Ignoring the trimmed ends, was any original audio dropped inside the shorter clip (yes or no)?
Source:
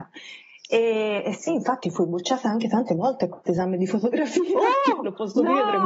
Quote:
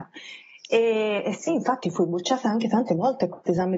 no